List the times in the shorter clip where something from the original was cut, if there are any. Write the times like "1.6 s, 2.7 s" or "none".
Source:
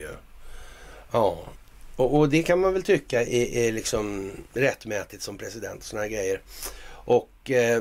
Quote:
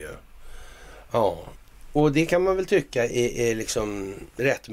2.0 s